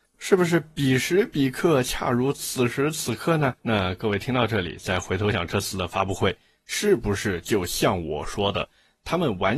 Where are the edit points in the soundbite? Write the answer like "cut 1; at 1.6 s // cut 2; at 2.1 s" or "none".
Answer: cut 1; at 3.6 s // cut 2; at 5.3 s